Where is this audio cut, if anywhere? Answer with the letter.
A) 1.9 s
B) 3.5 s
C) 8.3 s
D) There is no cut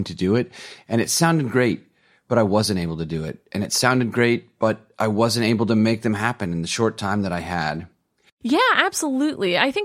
C